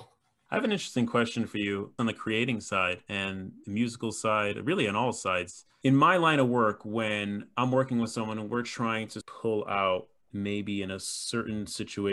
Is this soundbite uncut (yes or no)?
yes